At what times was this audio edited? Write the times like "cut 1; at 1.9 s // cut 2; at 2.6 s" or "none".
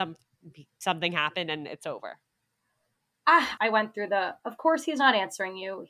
cut 1; at 3.6 s